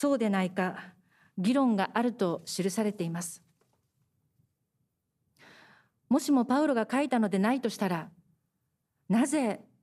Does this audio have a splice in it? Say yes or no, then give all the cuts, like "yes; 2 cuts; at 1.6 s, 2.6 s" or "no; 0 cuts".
no; 0 cuts